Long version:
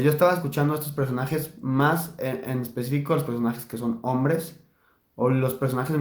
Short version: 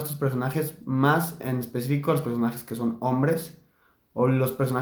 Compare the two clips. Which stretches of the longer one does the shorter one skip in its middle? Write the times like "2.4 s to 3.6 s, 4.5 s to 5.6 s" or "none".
2.2 s to 2.4 s

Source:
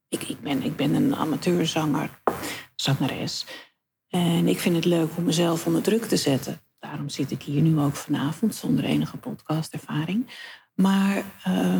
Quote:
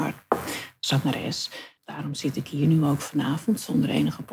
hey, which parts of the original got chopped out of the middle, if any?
3.7 s to 6.7 s

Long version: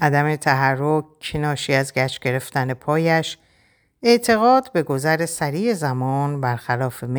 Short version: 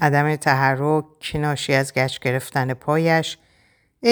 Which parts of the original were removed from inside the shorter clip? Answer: none

